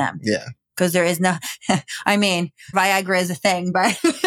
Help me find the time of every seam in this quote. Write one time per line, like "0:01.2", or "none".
0:02.7